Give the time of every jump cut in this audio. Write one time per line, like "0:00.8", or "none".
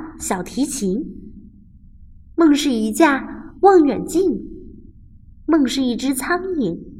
none